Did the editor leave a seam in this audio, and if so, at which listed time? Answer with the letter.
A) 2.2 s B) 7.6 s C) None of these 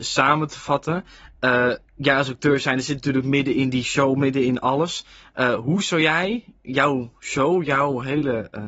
C